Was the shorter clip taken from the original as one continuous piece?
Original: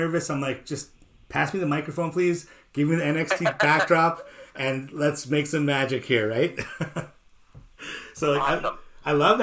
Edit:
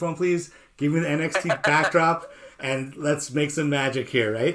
yes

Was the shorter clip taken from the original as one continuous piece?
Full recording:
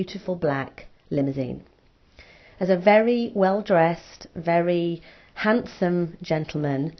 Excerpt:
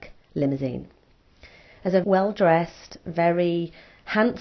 no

